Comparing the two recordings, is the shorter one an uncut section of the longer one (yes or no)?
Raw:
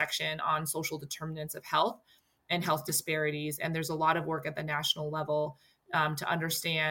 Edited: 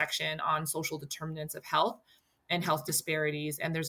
yes